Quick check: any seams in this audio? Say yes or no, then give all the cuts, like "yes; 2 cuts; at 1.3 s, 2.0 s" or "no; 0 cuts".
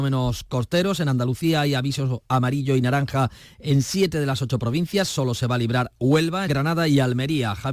yes; 1 cut; at 6.5 s